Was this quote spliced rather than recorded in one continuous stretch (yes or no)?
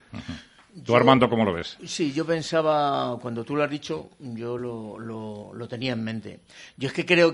no